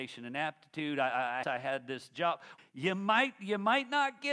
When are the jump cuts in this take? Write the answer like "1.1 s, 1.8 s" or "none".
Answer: 1.4 s, 2.6 s